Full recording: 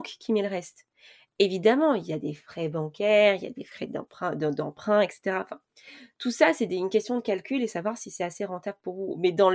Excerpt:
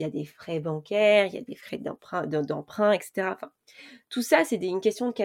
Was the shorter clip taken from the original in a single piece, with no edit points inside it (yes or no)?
yes